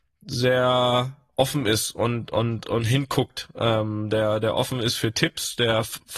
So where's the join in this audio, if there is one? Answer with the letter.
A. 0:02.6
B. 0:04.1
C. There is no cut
A